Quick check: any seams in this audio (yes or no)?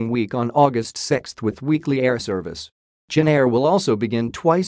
no